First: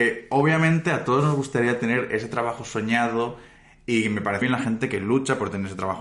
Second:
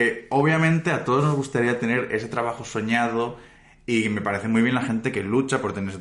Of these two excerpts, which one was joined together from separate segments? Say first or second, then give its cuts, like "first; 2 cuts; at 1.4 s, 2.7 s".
first; 1 cut; at 4.4 s